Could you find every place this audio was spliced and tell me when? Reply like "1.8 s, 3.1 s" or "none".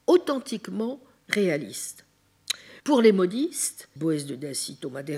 2.8 s, 4.0 s